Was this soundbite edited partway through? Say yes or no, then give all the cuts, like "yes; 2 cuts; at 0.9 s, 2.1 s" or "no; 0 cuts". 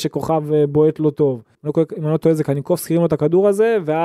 yes; 1 cut; at 1.5 s